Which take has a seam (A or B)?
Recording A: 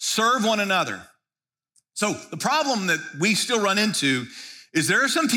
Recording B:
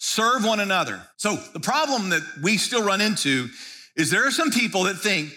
B